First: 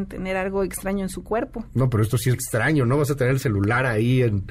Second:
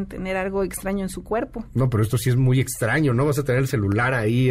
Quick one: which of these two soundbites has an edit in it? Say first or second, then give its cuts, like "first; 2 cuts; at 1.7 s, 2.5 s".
first; 1 cut; at 2.3 s